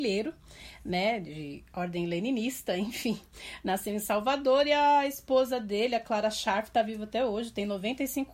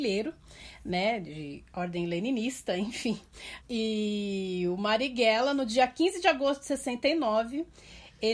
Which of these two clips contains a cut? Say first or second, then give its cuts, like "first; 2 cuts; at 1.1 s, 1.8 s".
second; 1 cut; at 3.6 s